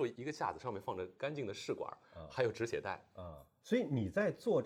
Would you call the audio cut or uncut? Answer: cut